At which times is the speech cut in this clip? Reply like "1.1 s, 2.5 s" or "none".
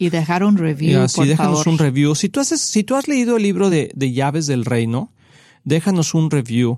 none